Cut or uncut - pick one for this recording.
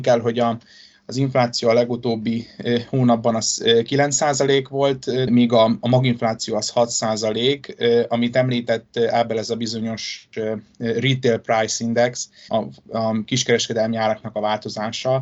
cut